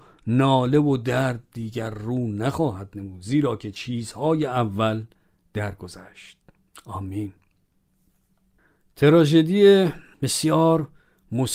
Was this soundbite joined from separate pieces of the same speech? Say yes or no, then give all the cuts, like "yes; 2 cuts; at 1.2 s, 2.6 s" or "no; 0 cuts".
no; 0 cuts